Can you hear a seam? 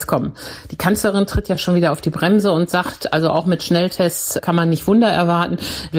no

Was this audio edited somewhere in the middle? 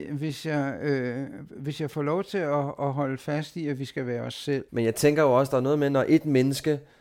yes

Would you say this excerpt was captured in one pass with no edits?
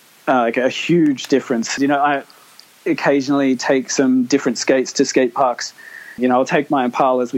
no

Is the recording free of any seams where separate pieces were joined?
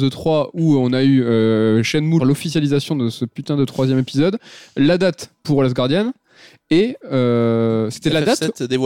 no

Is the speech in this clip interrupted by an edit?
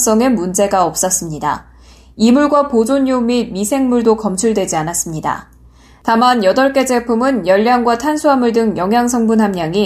no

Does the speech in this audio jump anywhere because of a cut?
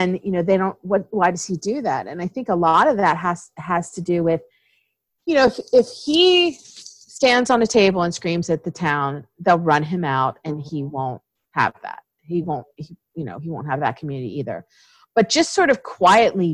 no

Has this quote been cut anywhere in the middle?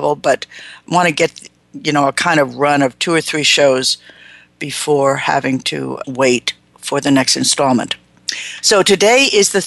yes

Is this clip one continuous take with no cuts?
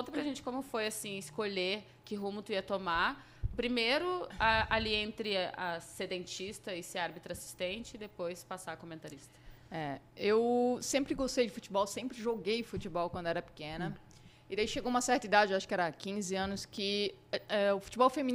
yes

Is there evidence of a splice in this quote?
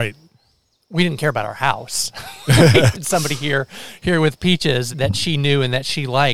yes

